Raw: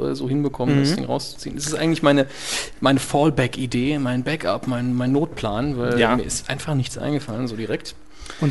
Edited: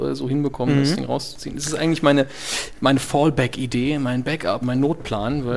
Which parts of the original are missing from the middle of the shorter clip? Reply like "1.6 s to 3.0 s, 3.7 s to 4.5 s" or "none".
4.6 s to 4.9 s